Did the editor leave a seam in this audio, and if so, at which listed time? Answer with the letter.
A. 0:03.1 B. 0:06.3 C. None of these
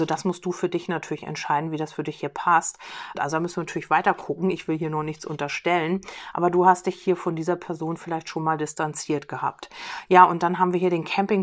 A